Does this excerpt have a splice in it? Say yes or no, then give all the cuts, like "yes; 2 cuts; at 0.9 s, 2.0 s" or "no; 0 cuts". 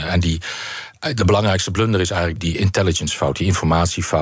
yes; 1 cut; at 2.4 s